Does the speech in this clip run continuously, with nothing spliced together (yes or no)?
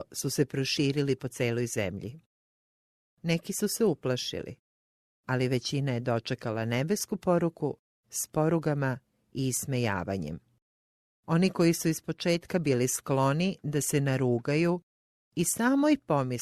no